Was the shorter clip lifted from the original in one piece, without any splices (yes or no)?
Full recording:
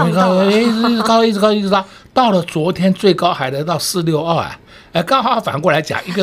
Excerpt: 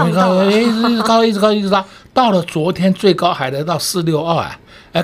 yes